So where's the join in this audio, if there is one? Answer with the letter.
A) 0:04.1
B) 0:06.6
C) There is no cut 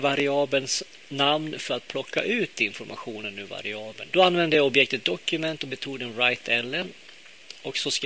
A